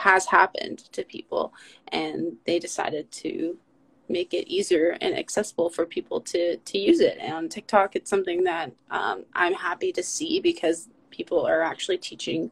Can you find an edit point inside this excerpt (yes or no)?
no